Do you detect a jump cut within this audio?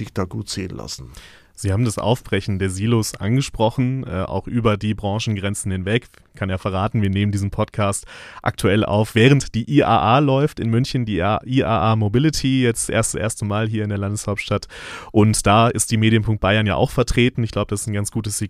no; 0 cuts

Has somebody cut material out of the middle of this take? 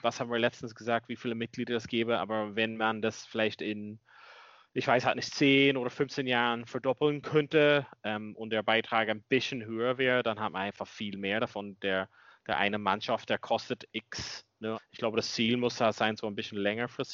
yes; 1 cut; at 14.7 s

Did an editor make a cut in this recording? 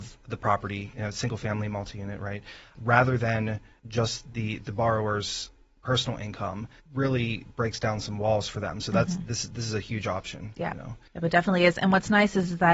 no; 0 cuts

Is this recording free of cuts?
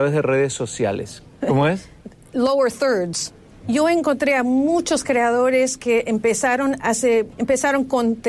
no; 3 cuts; at 1.4 s, 3.6 s, 7.3 s

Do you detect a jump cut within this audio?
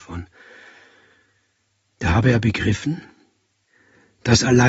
no; 0 cuts

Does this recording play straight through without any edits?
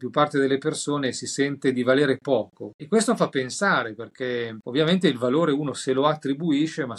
yes; 0 cuts

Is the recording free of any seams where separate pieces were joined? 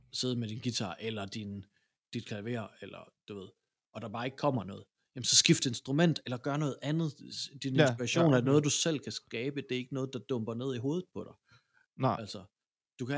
yes; 0 cuts

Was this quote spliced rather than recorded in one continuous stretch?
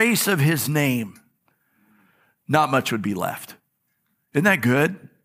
no; 0 cuts

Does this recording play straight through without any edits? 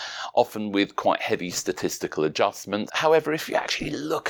no; 1 cut; at 2.9 s

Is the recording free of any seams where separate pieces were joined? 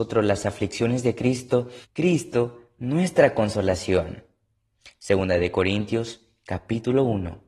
no; 1 cut; at 1.8 s

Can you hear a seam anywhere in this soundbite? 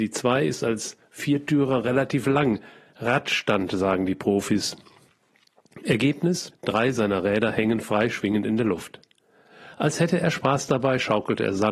yes; 1 cut; at 6.5 s

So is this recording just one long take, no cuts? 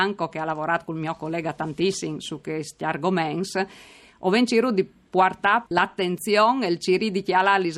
no; 1 cut; at 5.7 s

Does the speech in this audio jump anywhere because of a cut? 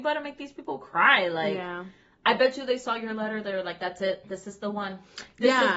no; 0 cuts

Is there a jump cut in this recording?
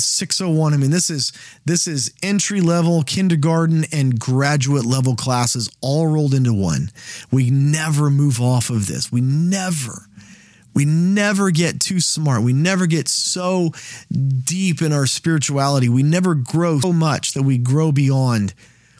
yes; 1 cut; at 16.8 s

